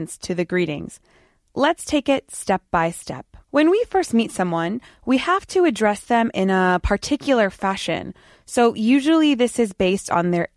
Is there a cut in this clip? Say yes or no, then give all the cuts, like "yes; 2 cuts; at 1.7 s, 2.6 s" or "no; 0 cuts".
yes; 1 cut; at 3.4 s